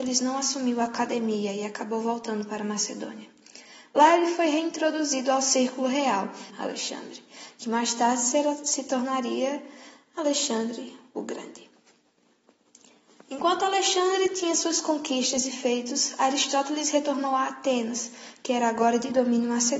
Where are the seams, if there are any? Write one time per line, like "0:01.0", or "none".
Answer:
0:06.5